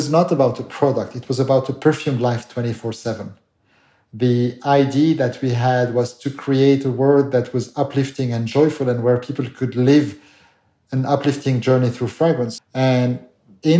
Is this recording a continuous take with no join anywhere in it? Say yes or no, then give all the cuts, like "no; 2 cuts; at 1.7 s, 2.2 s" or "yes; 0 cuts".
no; 1 cut; at 12.6 s